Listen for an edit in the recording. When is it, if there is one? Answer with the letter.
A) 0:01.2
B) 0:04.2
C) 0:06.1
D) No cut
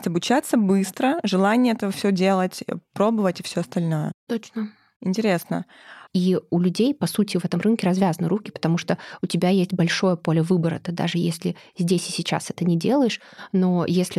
C